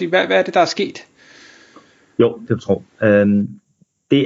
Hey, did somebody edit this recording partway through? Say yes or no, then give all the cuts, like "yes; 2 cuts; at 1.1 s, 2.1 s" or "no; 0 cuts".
no; 0 cuts